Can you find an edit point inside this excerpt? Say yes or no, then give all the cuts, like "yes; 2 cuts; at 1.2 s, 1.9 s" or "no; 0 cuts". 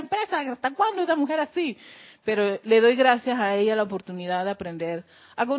no; 0 cuts